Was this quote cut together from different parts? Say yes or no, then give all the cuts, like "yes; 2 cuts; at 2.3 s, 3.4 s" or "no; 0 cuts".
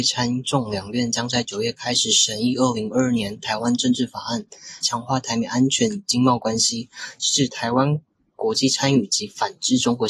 yes; 1 cut; at 4.8 s